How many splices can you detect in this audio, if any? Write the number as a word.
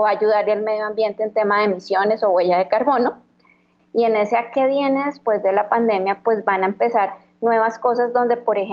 one